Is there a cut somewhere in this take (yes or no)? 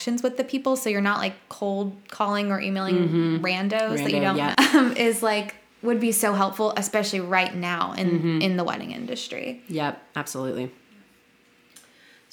yes